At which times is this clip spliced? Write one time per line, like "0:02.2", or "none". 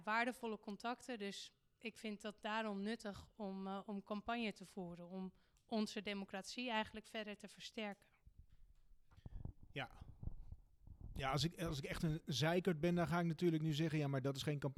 none